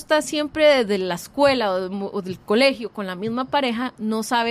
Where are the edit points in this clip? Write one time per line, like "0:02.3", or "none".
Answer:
none